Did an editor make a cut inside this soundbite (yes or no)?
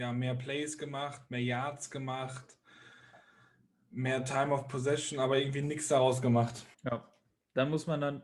yes